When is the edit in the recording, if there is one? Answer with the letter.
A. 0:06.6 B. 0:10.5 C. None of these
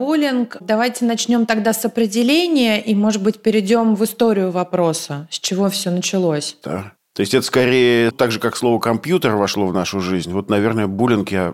A